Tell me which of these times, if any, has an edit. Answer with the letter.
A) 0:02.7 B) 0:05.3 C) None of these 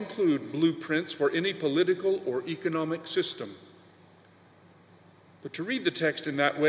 B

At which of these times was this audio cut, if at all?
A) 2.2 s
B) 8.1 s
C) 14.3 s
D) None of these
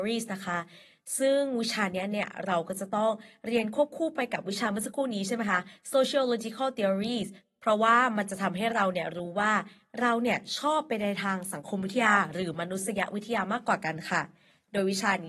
D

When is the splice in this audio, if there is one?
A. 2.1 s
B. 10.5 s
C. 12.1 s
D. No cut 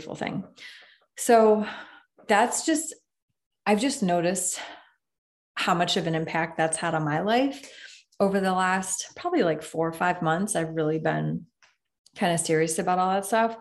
D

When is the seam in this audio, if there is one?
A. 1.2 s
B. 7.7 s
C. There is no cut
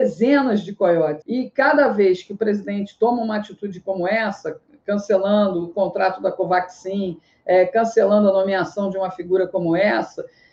A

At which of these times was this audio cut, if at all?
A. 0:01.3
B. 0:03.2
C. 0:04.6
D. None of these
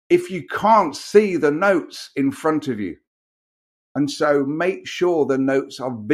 D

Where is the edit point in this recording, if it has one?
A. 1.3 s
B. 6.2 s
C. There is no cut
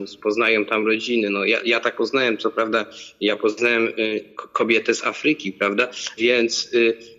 B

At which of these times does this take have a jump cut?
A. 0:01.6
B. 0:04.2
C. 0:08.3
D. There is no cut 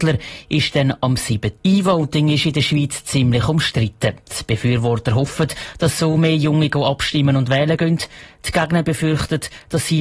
A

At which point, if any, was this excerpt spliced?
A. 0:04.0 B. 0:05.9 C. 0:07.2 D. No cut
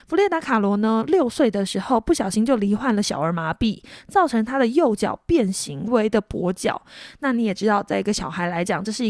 B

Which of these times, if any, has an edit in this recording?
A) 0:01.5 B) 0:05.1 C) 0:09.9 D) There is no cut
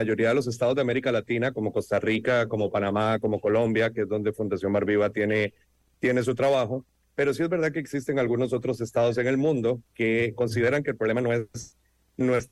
C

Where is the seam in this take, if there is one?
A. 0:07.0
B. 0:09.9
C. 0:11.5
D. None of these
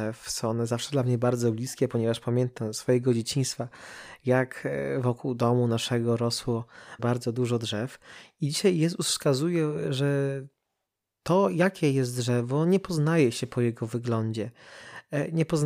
A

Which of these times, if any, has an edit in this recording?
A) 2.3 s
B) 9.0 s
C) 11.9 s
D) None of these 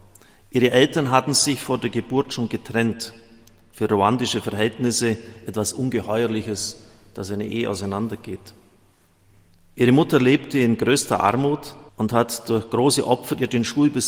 C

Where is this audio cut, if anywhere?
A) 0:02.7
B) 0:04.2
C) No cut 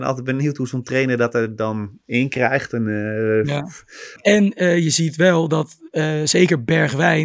B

